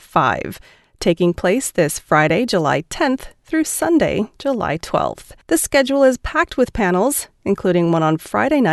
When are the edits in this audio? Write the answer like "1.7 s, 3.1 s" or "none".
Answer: 5.4 s